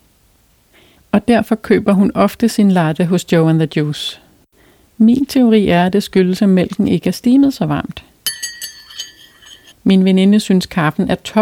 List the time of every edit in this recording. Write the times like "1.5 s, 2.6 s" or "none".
1.0 s, 9.7 s